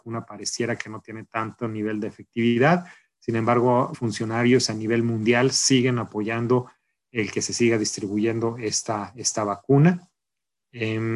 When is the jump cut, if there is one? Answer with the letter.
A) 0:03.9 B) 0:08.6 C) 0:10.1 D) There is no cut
A